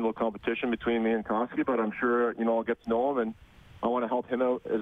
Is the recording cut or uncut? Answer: uncut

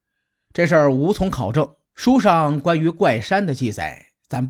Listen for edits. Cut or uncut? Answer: cut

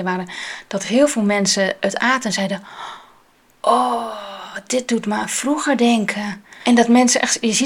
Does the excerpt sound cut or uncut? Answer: uncut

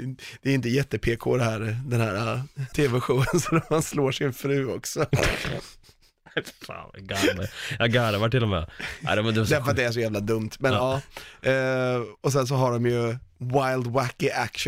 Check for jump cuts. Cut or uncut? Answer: cut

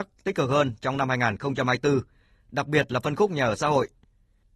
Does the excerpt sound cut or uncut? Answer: uncut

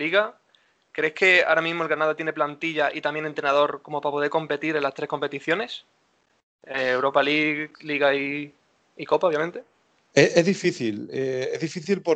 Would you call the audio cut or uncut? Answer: uncut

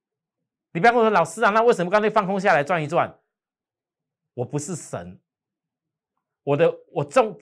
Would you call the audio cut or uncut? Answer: uncut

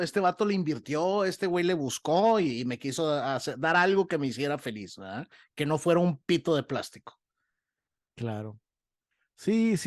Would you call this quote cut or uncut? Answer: uncut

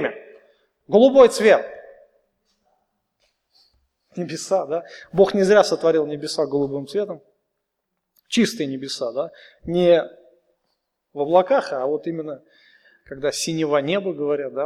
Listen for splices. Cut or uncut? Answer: uncut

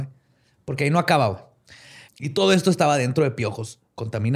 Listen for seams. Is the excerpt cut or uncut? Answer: cut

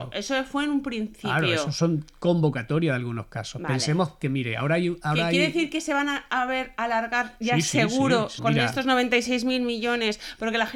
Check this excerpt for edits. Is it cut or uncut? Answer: cut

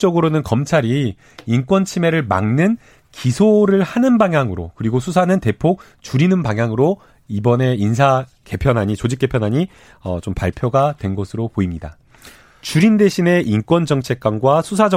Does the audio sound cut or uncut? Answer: cut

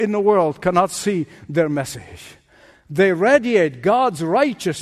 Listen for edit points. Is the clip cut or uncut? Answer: uncut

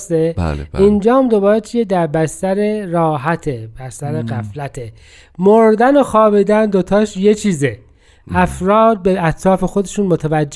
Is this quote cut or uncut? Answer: uncut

